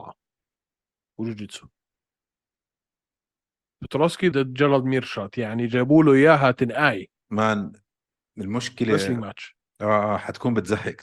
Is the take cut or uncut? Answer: cut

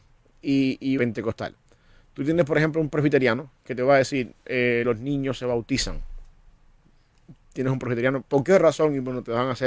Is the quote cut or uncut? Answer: cut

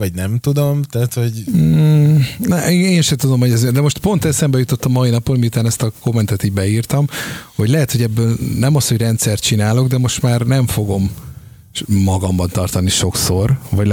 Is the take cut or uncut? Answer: uncut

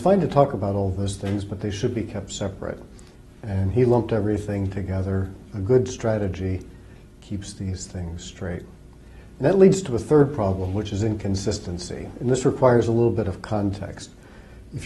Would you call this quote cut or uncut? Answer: uncut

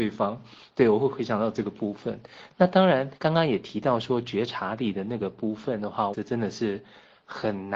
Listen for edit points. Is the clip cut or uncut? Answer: cut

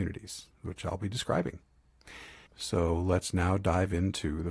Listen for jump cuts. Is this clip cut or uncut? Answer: cut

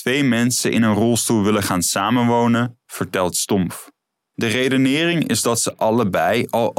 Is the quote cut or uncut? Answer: cut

